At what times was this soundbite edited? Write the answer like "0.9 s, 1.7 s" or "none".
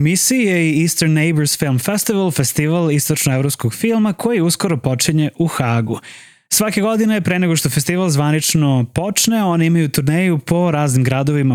none